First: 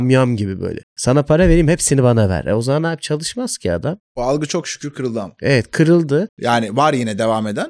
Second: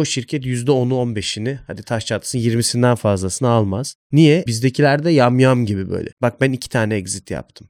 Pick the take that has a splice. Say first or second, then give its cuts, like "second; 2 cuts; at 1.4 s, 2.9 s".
second; 2 cuts; at 4.5 s, 6.2 s